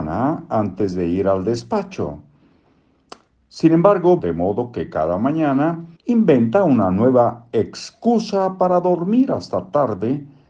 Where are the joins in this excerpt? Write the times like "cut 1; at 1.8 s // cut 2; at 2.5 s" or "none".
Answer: cut 1; at 4.2 s // cut 2; at 6.0 s

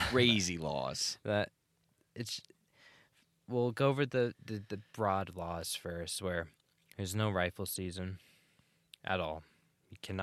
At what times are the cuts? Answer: none

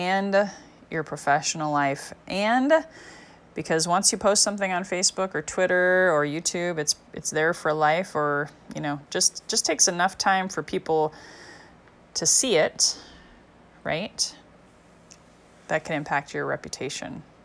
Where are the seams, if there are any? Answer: none

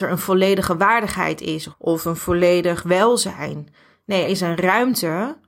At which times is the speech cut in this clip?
cut 1; at 1.7 s // cut 2; at 4.2 s

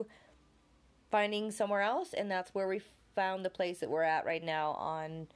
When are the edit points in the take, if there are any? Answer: none

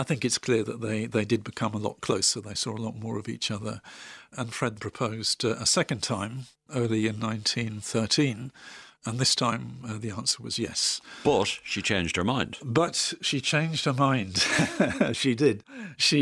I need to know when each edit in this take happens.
cut 1; at 4.8 s

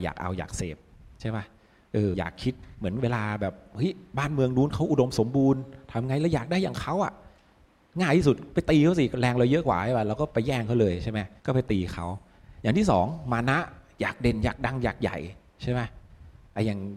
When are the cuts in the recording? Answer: cut 1; at 2.1 s // cut 2; at 11.4 s

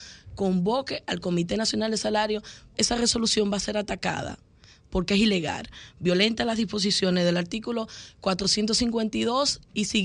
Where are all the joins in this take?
cut 1; at 2.7 s

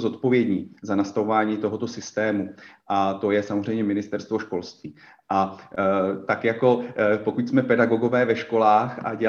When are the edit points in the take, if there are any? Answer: none

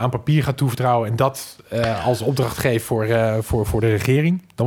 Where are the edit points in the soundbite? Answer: none

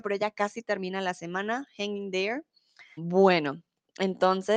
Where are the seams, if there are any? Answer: cut 1; at 3.0 s

